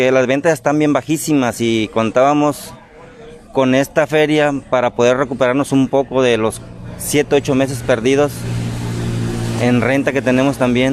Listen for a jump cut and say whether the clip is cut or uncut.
uncut